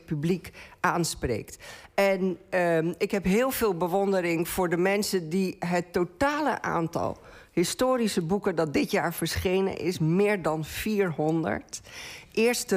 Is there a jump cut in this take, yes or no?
no